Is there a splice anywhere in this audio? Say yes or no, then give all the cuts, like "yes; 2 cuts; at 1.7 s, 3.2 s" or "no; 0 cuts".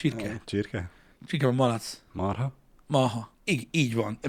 yes; 1 cut; at 3.3 s